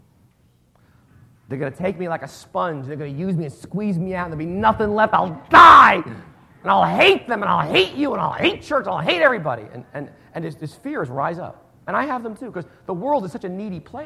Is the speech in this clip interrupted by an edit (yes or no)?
no